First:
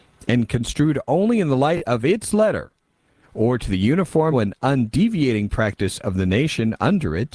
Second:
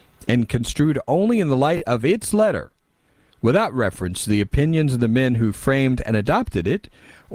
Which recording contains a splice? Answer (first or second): first